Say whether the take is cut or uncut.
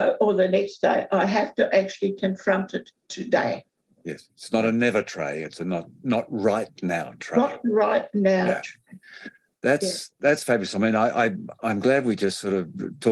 uncut